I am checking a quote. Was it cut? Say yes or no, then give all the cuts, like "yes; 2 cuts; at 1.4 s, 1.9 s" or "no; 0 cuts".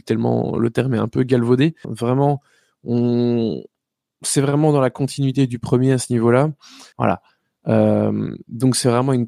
yes; 2 cuts; at 1.8 s, 6.9 s